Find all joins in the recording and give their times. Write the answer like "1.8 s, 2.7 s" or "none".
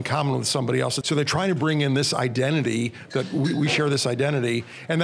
1.0 s